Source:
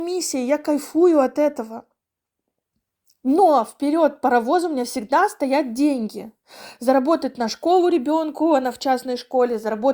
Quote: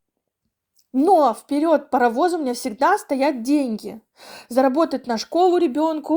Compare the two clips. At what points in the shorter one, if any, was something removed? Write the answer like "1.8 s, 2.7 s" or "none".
none